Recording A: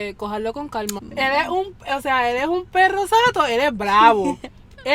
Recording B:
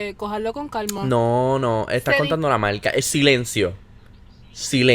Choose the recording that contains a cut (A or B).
A